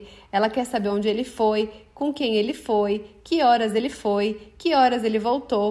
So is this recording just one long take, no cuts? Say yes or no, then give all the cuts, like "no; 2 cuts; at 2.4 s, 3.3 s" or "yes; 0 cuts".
yes; 0 cuts